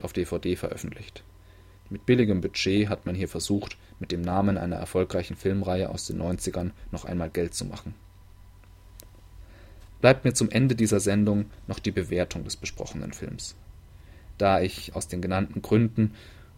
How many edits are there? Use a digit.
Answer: 1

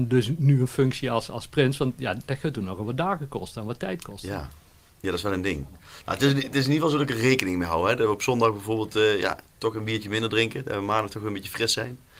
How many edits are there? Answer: 0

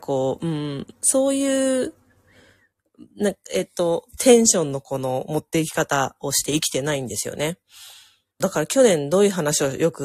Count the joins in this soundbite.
1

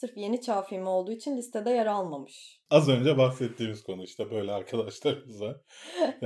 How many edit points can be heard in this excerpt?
0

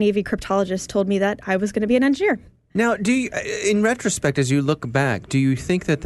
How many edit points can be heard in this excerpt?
0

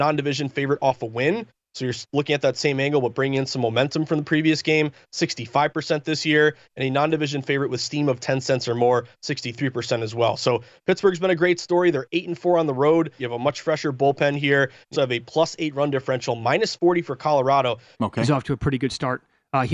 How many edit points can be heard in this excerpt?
3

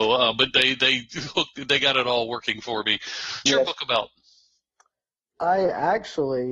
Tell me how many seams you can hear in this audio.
1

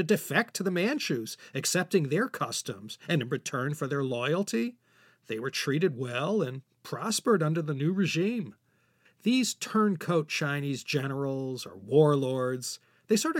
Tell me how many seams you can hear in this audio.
0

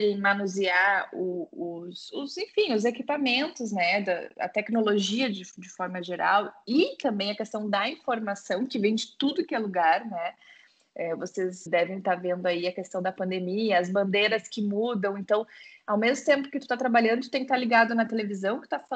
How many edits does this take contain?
1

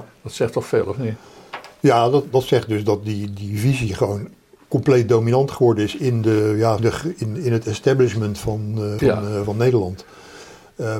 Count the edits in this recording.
2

